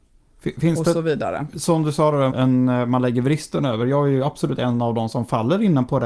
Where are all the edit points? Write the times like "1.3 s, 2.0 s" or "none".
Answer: 2.3 s